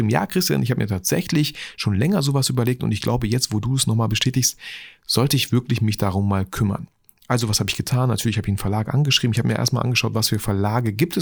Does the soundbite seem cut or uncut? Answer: uncut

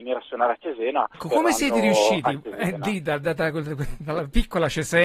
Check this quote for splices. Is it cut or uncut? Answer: cut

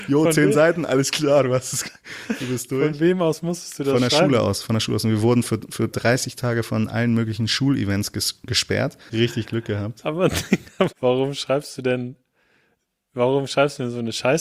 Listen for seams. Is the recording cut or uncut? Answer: cut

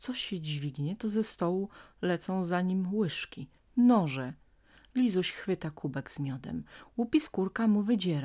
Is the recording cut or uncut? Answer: uncut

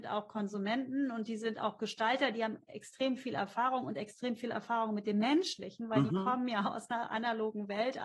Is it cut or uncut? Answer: uncut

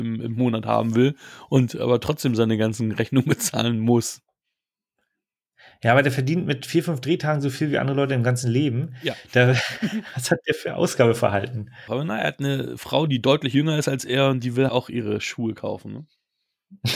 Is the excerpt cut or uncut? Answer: cut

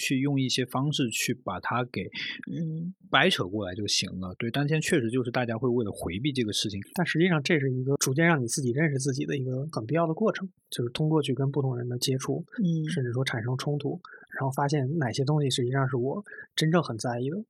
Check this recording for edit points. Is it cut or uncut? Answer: cut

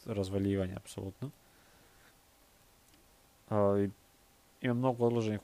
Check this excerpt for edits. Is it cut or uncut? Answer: uncut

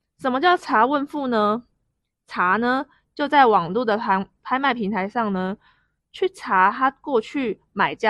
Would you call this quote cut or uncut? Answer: uncut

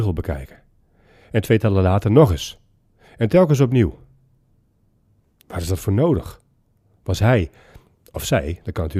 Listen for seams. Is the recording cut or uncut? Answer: uncut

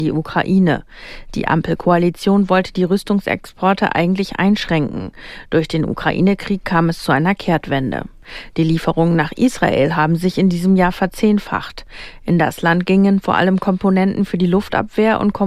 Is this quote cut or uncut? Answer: uncut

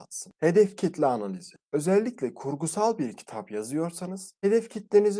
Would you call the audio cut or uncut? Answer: uncut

